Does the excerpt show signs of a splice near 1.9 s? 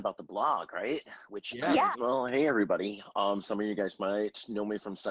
yes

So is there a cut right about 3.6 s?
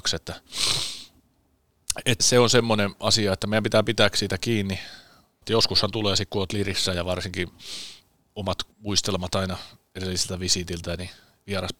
no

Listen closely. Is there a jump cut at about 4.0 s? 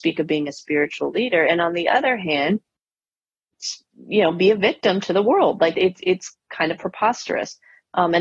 no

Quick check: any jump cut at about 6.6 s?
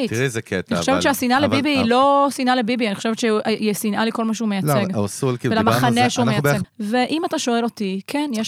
yes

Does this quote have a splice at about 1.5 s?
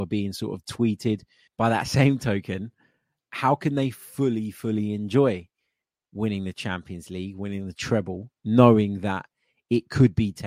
yes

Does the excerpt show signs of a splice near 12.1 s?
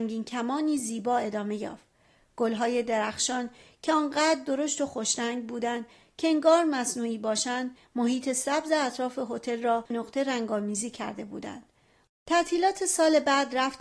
yes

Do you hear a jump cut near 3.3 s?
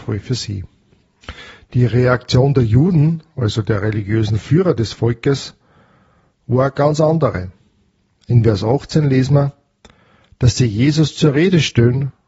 no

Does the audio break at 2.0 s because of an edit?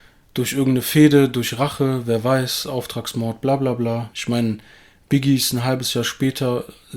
no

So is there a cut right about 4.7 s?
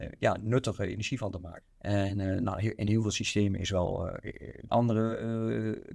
yes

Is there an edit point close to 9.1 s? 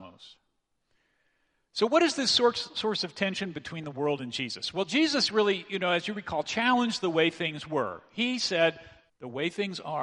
yes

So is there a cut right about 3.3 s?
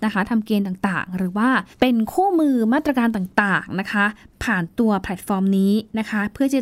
no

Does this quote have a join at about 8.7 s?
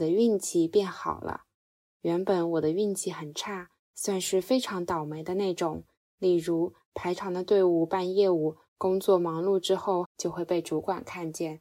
yes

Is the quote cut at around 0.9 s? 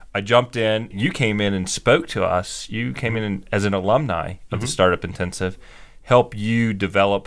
yes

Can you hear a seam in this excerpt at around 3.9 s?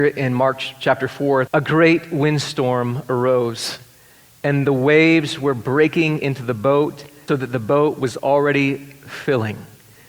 no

